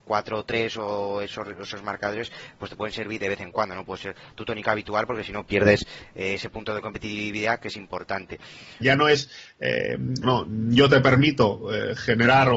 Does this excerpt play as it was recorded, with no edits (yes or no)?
no